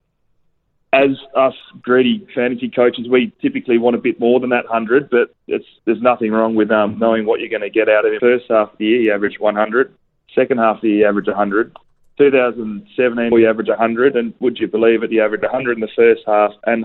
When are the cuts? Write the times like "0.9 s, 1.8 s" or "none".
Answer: 8.2 s, 13.3 s